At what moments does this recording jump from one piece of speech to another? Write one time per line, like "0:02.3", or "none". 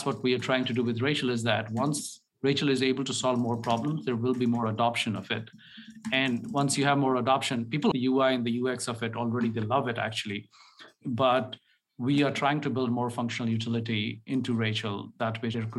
0:07.9